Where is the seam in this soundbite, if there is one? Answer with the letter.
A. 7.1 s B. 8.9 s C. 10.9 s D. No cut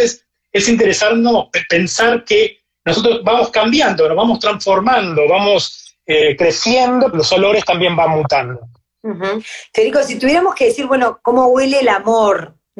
A